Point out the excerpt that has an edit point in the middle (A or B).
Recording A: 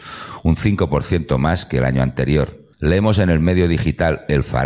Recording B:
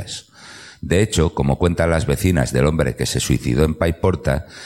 A